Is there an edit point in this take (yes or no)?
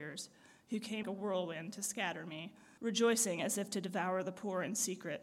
yes